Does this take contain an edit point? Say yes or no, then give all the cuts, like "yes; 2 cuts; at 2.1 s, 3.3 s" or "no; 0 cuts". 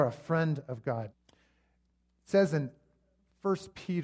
yes; 1 cut; at 1.1 s